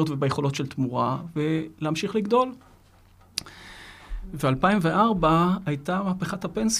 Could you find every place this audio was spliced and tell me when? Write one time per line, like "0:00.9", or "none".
none